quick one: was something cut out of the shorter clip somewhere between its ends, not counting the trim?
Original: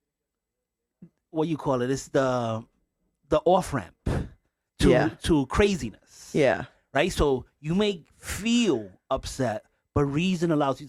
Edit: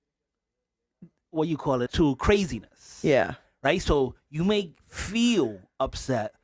yes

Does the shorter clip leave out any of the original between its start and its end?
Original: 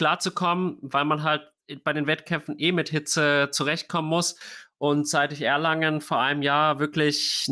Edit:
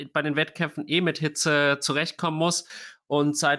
no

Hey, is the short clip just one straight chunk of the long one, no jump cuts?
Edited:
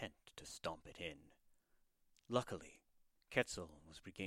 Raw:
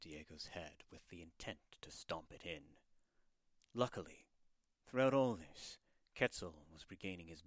no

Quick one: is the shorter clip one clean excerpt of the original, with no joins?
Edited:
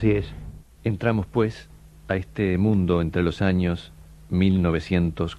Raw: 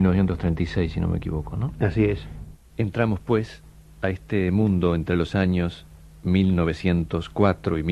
yes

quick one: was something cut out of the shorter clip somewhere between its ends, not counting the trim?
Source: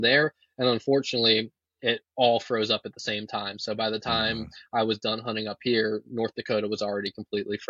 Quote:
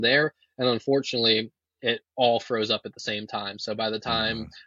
no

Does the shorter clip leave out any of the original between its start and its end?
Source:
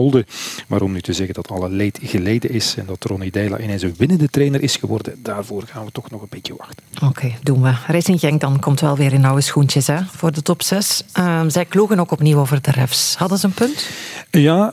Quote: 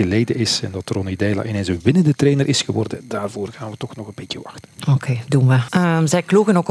yes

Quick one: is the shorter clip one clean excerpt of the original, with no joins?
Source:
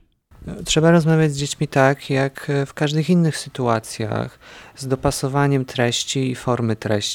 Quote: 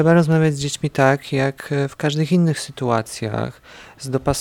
yes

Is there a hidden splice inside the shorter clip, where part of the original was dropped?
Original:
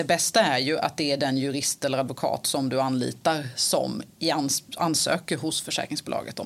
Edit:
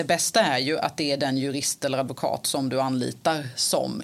no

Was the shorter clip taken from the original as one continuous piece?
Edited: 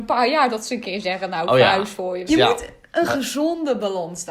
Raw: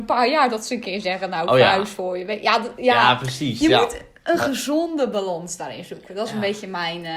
no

